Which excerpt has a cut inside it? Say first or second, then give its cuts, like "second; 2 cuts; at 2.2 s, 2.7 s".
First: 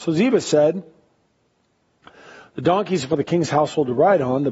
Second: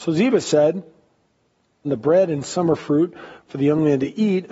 second; 1 cut; at 1.8 s